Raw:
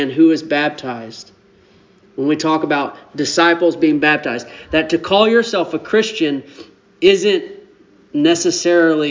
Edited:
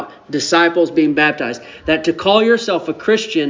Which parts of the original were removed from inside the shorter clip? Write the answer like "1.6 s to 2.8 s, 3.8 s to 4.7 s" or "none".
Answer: none